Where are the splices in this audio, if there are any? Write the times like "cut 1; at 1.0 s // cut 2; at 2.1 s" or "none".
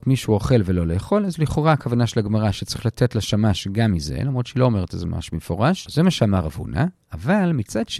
cut 1; at 5.9 s